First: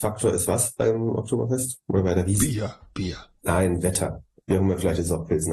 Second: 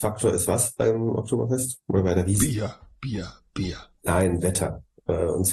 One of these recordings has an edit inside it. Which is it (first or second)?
first